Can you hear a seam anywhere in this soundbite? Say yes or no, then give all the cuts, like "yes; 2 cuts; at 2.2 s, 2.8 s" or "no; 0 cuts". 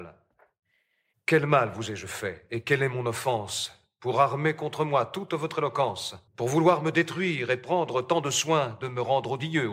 yes; 2 cuts; at 1.1 s, 6.3 s